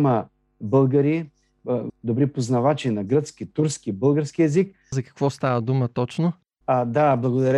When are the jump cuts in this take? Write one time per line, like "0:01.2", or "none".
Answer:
0:01.9
0:04.9

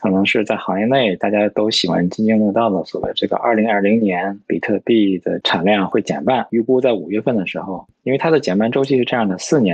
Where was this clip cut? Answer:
none

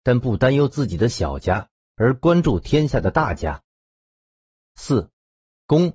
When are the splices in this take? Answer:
none

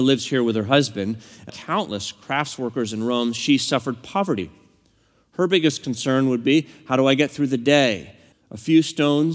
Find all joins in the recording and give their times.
0:01.5
0:08.3

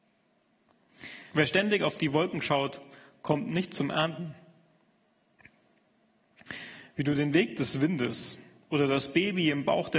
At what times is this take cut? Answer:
0:01.3

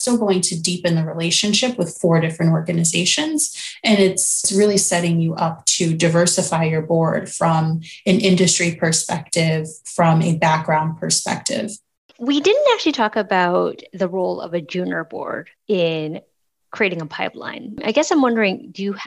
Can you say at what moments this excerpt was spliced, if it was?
0:15.6

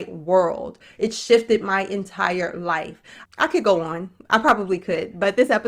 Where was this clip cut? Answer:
0:03.2

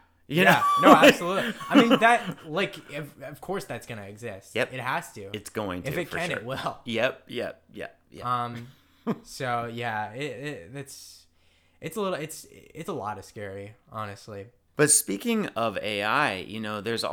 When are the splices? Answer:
none

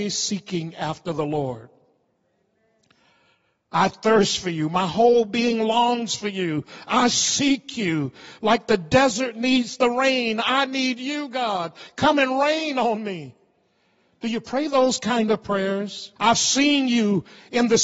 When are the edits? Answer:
0:16.2

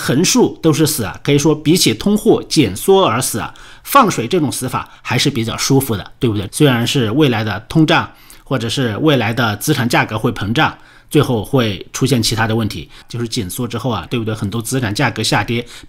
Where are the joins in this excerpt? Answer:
0:06.5
0:13.0
0:14.1

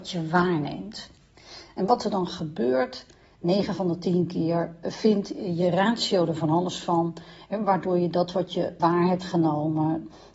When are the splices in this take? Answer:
0:08.8

